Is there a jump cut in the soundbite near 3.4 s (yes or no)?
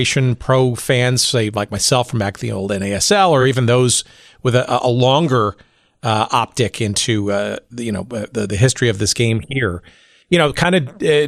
no